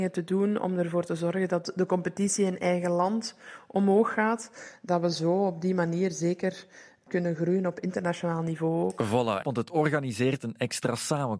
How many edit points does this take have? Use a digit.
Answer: 1